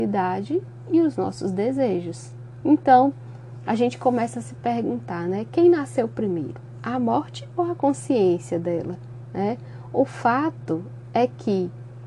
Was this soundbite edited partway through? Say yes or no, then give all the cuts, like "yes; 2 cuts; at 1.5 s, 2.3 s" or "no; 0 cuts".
yes; 1 cut; at 2.6 s